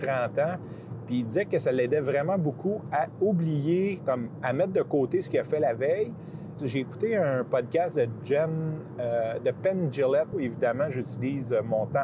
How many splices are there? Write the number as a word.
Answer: two